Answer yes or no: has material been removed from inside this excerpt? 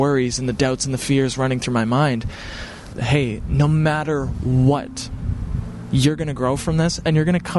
yes